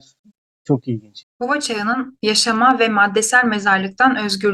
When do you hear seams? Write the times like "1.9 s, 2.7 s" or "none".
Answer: 1.2 s

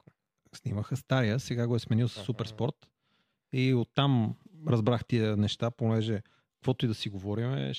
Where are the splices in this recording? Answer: none

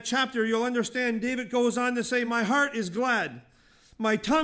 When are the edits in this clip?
none

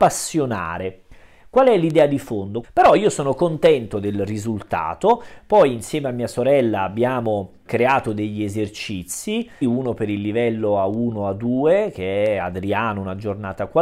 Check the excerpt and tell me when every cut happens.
2.6 s, 9.6 s

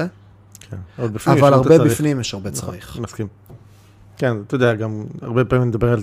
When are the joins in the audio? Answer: none

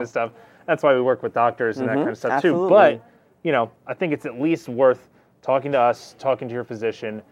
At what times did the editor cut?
none

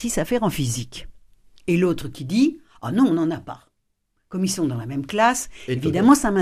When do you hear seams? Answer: none

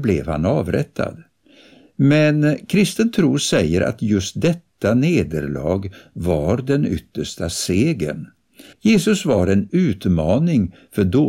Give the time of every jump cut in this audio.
8.7 s

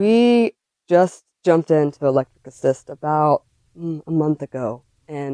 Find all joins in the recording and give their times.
none

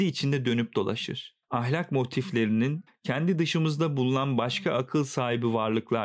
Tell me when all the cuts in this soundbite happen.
1.4 s, 2.9 s

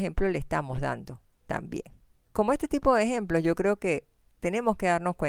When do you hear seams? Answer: 2.1 s

